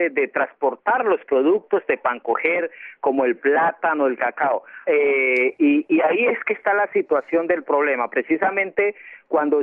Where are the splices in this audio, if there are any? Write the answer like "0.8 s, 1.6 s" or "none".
4.8 s